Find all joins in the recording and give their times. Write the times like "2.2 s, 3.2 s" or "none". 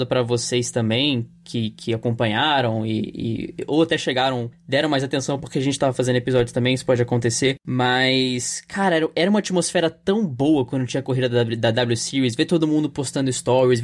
none